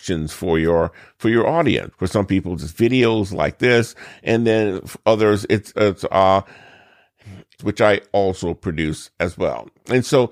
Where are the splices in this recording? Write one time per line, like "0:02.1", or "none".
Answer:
0:01.9
0:05.7
0:07.6